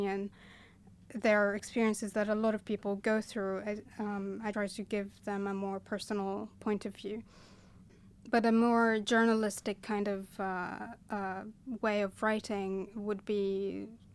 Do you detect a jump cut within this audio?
yes; 1 cut; at 4.5 s

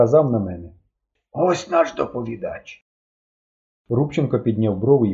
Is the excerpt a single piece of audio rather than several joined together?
yes; 0 cuts

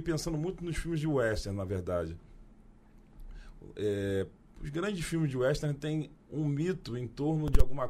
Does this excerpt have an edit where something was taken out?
yes; 1 cut; at 6.2 s

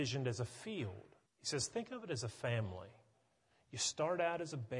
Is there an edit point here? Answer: yes; 1 cut; at 1.3 s

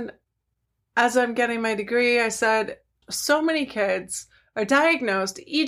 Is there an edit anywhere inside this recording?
yes; 1 cut; at 3.0 s

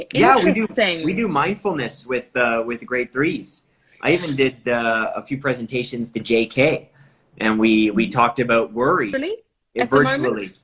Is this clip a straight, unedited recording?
yes; 0 cuts

